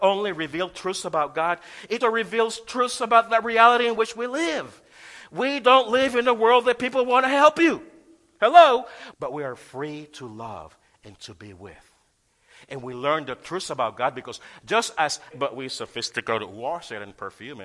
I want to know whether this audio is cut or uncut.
cut